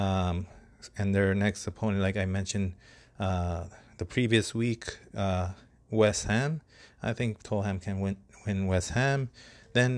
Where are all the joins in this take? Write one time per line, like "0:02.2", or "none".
none